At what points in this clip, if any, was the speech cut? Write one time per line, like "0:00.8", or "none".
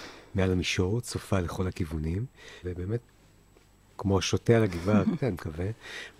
0:02.6
0:05.2